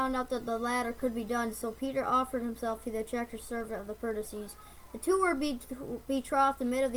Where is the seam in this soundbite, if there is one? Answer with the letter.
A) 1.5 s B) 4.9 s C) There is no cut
C